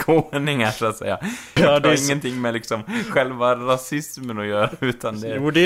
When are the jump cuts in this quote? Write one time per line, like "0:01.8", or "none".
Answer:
0:01.6